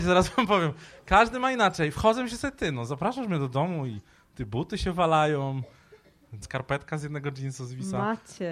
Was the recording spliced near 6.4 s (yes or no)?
yes